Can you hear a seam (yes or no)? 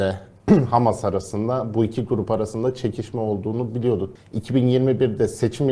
yes